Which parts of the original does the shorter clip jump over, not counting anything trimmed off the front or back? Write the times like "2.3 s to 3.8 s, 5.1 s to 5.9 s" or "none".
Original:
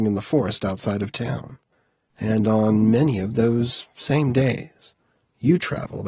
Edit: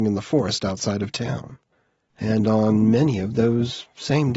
none